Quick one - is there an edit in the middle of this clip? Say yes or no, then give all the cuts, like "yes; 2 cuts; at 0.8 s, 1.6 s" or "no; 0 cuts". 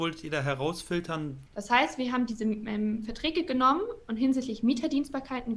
yes; 1 cut; at 1.5 s